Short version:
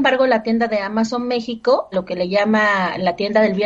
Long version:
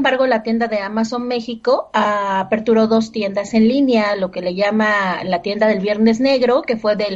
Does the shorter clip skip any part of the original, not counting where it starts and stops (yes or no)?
yes